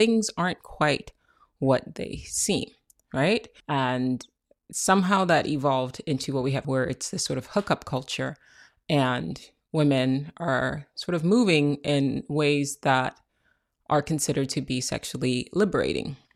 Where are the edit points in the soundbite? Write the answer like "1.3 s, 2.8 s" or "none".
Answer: 3.6 s, 6.6 s